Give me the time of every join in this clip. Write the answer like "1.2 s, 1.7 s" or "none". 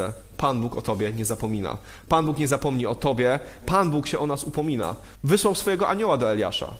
3.6 s, 5.1 s